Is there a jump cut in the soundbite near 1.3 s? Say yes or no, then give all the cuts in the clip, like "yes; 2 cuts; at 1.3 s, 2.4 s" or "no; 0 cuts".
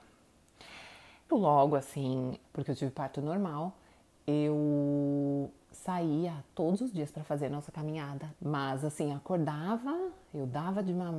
yes; 3 cuts; at 1.3 s, 2.4 s, 8.4 s